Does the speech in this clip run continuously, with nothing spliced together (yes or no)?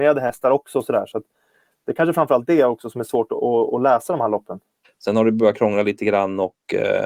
no